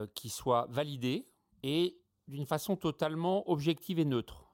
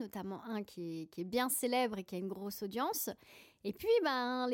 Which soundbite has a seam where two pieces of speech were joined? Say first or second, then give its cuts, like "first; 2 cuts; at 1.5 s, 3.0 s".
first; 1 cut; at 1.5 s